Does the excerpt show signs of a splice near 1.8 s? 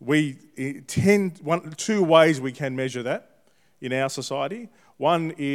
yes; 1 cut; at 1.8 s

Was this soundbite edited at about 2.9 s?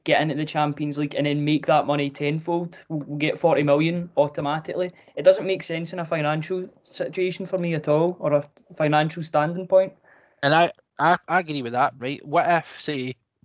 no; 1 cut; at 12.0 s

